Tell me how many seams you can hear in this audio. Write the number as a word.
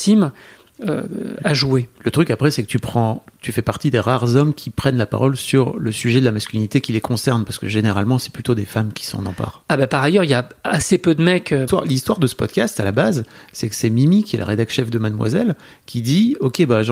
one